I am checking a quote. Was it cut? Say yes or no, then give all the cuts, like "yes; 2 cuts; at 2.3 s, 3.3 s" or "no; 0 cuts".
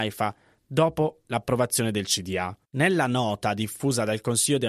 yes; 1 cut; at 2.6 s